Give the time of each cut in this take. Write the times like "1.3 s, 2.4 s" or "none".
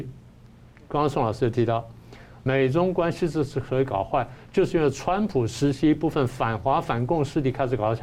none